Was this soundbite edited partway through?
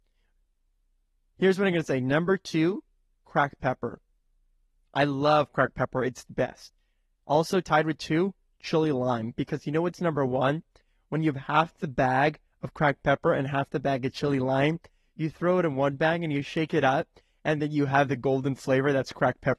no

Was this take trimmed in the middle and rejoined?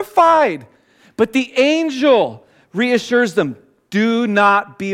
no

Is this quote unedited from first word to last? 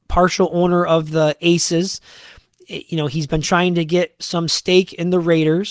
yes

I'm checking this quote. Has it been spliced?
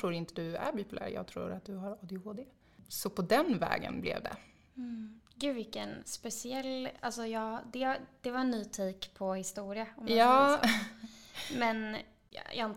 no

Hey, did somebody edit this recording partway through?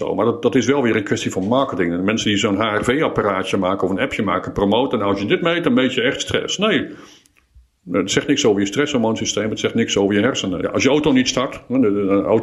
yes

